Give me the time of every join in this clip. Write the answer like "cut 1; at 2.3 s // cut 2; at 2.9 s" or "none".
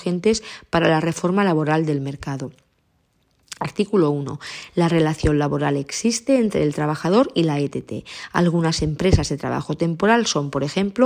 cut 1; at 4.7 s